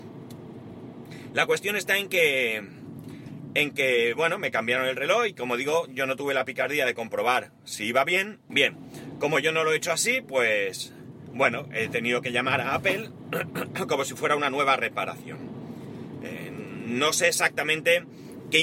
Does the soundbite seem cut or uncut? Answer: cut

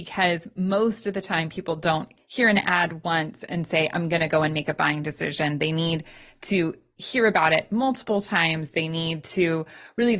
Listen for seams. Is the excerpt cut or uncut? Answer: uncut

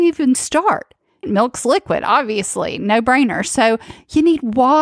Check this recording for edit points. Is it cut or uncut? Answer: cut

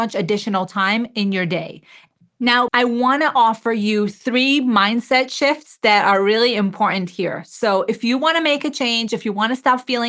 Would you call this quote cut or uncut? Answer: cut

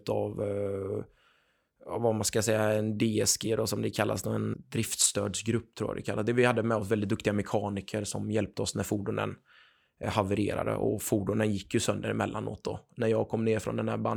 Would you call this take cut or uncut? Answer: cut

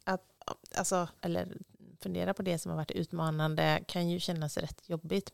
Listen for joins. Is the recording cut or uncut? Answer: cut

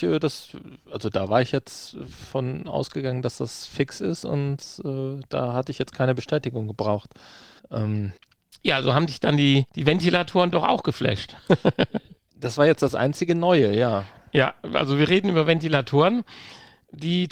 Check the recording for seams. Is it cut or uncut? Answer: uncut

